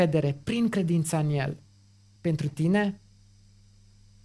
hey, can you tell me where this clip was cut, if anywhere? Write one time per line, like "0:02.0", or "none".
0:02.2